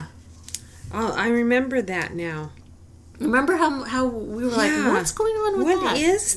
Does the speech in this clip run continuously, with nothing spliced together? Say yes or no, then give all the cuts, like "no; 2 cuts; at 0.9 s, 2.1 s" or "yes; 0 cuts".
yes; 0 cuts